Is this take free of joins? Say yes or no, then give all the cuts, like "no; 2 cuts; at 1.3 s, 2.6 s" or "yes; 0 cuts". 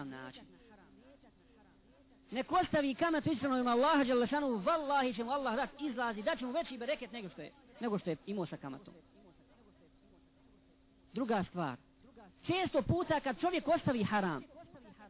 yes; 0 cuts